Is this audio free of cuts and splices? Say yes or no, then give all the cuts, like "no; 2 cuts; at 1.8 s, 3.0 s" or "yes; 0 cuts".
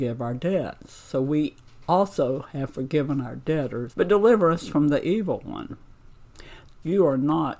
no; 2 cuts; at 3.9 s, 6.7 s